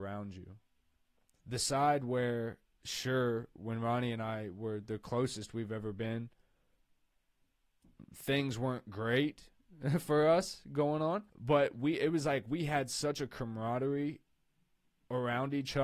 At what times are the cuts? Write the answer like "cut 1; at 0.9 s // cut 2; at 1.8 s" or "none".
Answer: cut 1; at 1.3 s // cut 2; at 11.3 s